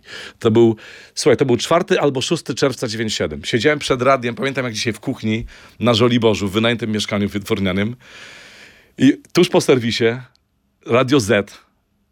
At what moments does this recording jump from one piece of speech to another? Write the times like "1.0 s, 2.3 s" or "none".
none